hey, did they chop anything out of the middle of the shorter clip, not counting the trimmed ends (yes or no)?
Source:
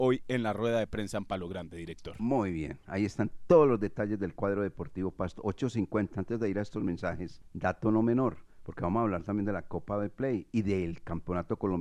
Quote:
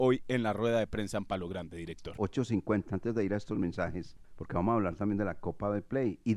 yes